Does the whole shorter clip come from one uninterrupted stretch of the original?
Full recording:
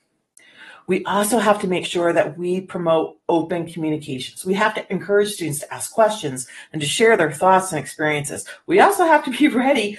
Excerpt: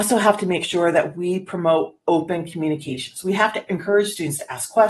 yes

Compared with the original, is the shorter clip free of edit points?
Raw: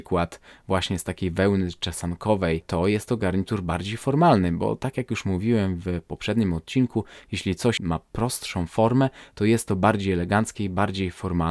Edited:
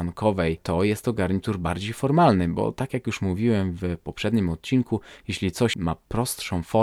yes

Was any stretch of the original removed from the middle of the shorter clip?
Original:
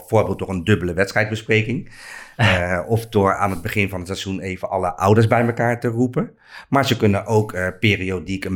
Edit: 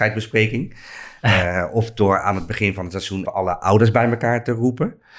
yes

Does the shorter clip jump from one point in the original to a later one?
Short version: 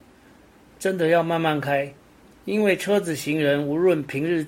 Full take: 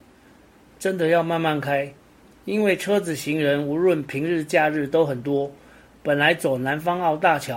no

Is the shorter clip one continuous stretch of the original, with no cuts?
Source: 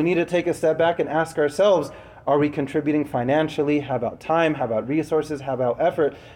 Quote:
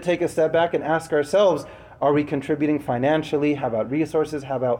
no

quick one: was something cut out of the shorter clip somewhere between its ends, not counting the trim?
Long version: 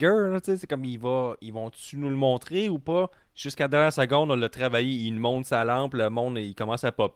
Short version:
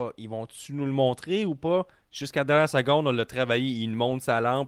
no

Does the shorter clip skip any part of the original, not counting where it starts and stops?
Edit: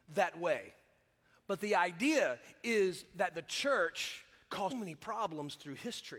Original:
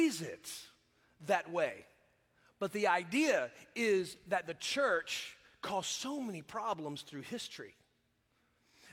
yes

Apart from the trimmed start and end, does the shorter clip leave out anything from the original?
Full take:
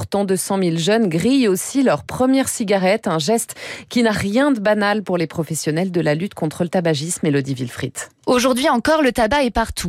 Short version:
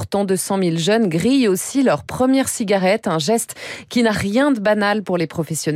no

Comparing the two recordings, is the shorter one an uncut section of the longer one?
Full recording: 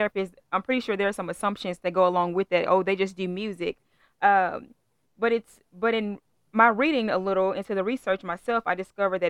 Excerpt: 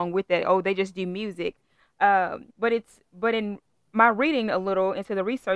no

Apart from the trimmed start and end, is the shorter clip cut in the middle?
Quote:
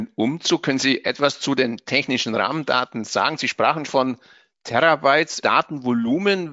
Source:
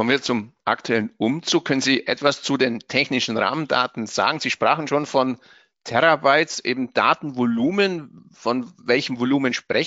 yes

